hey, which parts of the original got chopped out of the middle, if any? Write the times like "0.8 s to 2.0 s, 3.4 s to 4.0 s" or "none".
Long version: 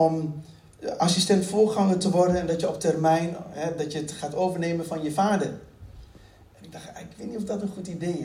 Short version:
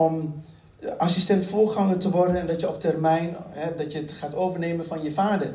none